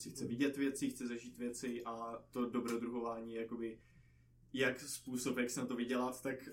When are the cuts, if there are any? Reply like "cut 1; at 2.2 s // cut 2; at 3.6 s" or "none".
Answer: none